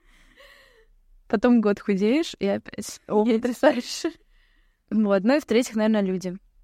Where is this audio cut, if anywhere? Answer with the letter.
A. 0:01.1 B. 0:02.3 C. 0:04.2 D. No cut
C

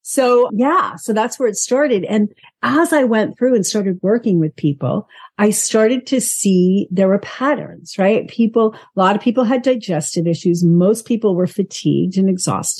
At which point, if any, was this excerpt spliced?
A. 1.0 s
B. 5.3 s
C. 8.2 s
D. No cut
D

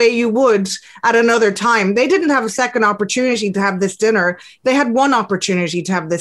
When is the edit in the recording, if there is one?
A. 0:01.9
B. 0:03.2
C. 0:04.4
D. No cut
D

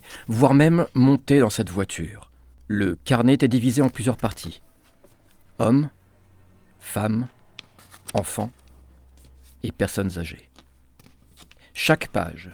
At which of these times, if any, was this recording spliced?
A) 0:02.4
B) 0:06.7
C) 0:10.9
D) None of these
D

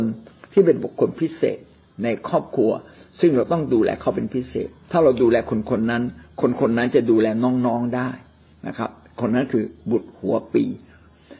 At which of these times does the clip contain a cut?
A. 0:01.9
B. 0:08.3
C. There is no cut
C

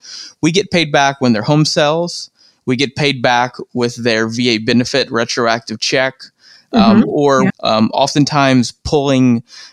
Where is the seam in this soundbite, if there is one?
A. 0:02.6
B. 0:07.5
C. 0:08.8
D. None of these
B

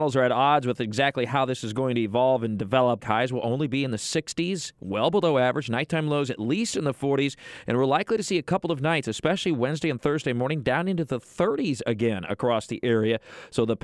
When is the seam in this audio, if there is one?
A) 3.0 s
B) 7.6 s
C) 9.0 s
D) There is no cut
A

